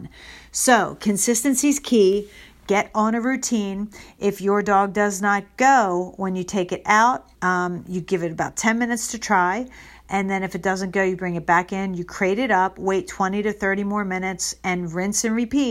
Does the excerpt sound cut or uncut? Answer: cut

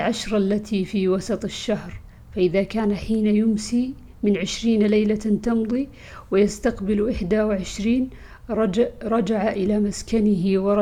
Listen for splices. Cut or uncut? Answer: uncut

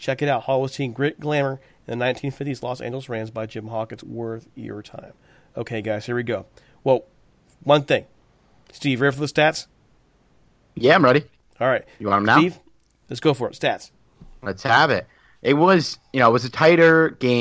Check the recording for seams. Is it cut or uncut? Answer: cut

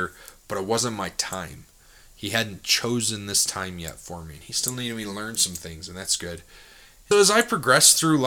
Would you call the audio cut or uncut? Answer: cut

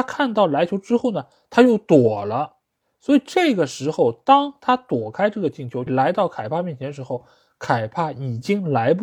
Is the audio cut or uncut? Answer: cut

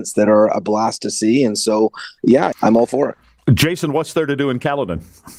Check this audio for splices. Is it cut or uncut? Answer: cut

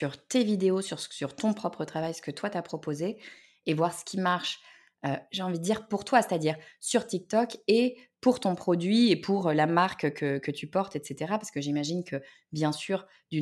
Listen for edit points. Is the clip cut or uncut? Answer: uncut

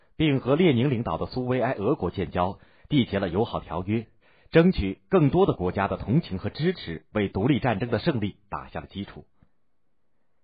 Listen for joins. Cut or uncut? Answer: uncut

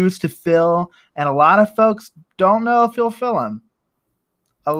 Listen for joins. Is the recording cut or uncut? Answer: uncut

